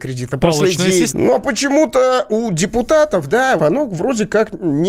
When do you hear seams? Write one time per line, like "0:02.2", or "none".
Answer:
0:01.1
0:03.6